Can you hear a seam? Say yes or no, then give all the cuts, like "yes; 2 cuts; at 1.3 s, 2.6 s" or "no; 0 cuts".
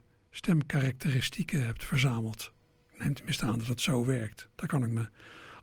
no; 0 cuts